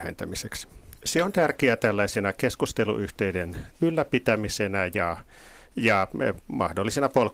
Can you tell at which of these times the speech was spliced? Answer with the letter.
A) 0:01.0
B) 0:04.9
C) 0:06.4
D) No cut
A